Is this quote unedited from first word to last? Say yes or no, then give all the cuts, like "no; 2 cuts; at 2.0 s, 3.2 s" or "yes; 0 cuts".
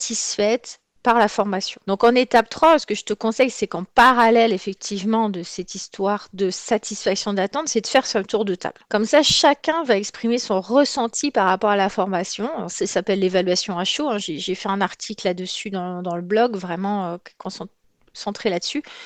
yes; 0 cuts